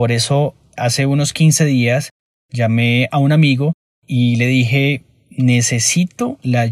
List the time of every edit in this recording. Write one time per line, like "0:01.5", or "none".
none